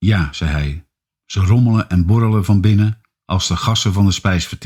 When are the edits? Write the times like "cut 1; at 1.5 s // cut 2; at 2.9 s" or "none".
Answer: none